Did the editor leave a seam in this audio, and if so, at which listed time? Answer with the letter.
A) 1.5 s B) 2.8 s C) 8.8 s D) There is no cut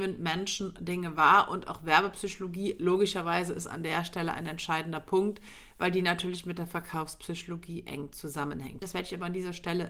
C